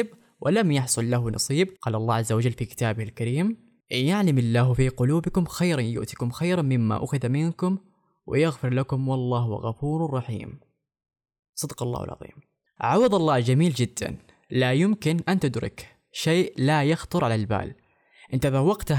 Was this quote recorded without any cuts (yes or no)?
no